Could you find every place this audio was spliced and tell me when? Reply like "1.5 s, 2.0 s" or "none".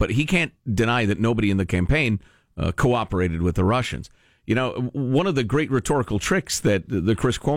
none